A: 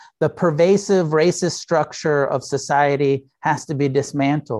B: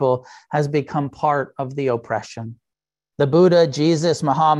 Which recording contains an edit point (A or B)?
B